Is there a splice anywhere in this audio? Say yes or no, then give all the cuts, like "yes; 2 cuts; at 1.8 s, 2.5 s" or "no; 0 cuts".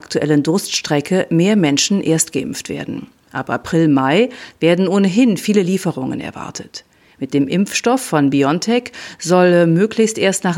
no; 0 cuts